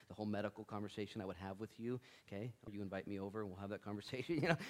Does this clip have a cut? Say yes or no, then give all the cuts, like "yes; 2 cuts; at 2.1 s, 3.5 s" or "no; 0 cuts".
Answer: yes; 1 cut; at 2.7 s